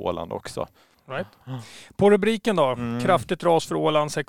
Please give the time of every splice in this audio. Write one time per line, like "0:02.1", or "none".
0:00.9